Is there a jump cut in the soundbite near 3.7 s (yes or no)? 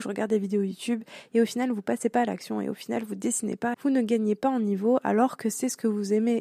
yes